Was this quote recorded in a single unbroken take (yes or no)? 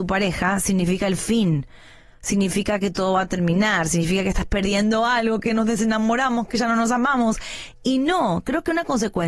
yes